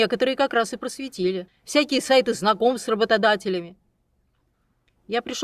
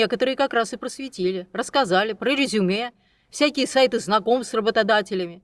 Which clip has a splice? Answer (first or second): first